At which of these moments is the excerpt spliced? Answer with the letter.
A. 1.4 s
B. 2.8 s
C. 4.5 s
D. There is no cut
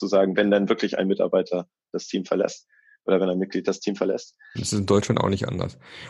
C